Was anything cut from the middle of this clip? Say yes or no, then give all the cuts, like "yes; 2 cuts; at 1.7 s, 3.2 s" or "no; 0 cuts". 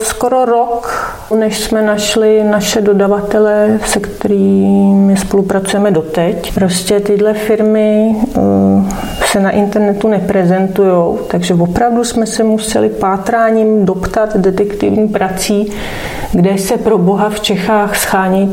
yes; 2 cuts; at 1.3 s, 6.6 s